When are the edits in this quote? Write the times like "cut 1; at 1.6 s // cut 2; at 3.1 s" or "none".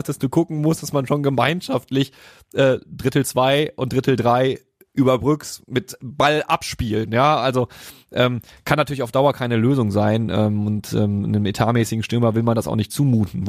none